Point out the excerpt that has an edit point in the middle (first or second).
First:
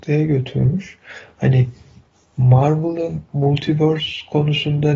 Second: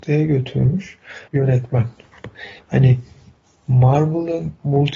second